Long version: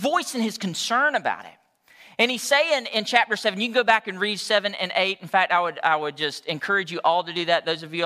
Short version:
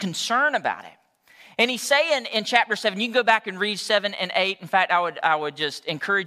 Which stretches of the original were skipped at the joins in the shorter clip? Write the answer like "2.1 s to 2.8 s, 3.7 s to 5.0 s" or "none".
none